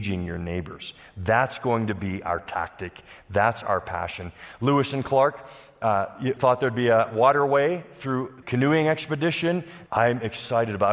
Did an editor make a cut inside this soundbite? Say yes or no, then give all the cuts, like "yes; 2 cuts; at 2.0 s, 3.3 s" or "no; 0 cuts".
yes; 3 cuts; at 6.4 s, 8.4 s, 9.9 s